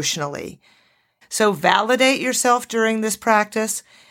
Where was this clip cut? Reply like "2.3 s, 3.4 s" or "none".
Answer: 1.2 s